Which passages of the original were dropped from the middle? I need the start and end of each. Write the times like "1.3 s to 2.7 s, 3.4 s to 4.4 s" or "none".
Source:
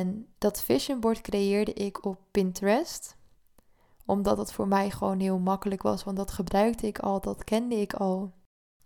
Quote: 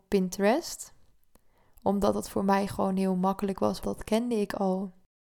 6.0 s to 7.2 s